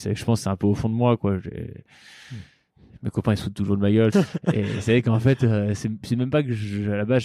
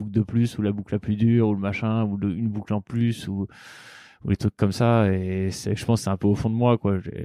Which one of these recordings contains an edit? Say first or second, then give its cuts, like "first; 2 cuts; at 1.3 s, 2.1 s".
first; 1 cut; at 4.1 s